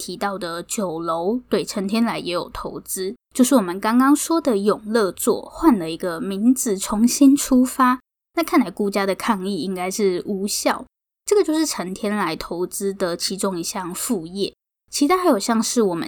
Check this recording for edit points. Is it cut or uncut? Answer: cut